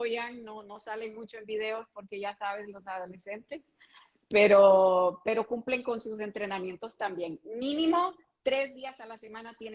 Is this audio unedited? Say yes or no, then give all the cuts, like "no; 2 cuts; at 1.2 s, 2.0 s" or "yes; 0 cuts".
yes; 0 cuts